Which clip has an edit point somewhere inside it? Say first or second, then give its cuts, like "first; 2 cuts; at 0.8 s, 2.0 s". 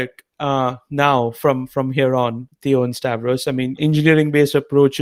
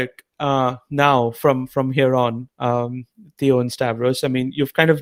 first; 2 cuts; at 2.5 s, 3.8 s